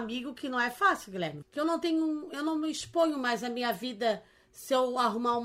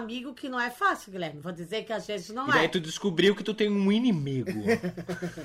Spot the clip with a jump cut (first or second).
first